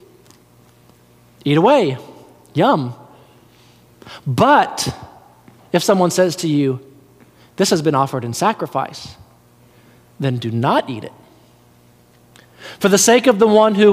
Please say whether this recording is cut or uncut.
uncut